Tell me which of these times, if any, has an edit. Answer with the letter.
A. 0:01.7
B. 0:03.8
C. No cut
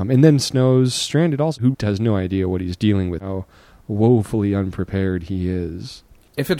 A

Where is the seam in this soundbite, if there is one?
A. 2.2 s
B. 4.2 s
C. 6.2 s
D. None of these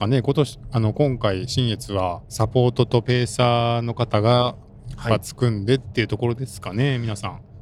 A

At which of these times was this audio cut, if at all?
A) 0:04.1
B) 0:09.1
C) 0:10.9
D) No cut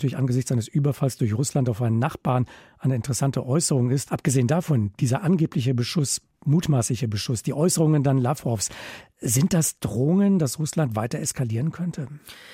A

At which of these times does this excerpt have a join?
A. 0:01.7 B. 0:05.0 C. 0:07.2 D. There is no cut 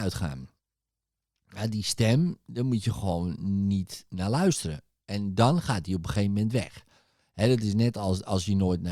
D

